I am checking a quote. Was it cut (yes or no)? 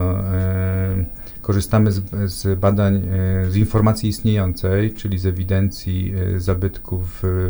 no